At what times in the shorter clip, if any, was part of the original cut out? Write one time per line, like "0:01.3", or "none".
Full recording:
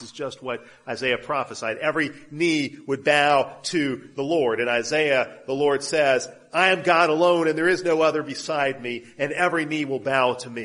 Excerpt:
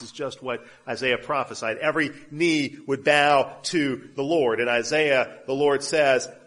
none